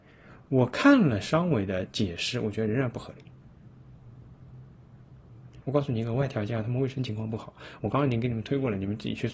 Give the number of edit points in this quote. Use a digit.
2